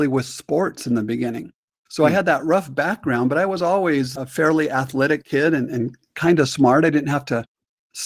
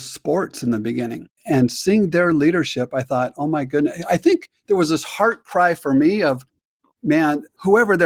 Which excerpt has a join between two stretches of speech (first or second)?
second